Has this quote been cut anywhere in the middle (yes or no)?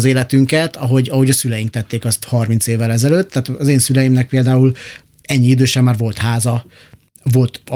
no